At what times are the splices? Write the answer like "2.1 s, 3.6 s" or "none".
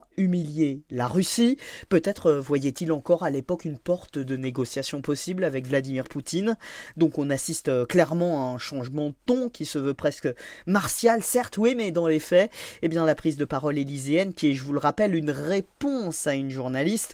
none